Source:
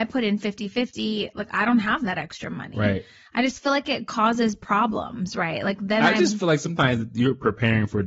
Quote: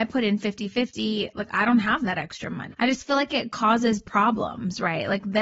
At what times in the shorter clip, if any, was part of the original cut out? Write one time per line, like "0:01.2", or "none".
0:02.7